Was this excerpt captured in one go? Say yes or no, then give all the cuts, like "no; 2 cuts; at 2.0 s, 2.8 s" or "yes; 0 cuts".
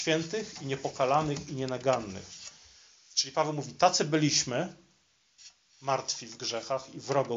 yes; 0 cuts